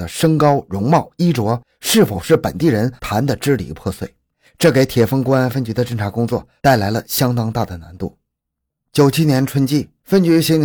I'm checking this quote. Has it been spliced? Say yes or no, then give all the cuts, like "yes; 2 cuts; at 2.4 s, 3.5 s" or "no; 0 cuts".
no; 0 cuts